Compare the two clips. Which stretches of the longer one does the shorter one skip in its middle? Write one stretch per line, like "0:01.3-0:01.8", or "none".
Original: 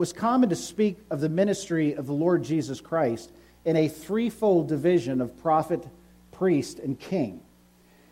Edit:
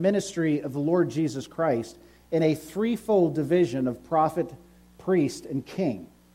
none